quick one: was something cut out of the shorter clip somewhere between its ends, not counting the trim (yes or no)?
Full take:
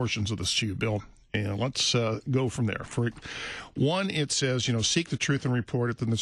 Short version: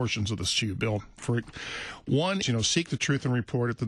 yes